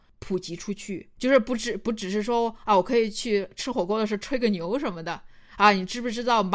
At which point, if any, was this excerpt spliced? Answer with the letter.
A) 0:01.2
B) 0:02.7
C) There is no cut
A